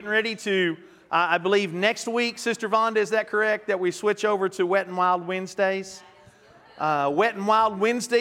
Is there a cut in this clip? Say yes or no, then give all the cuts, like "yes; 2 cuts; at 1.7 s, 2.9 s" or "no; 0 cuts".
no; 0 cuts